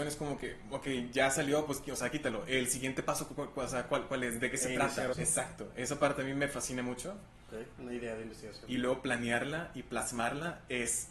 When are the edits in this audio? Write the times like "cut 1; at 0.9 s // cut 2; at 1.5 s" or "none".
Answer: cut 1; at 5.1 s // cut 2; at 7.8 s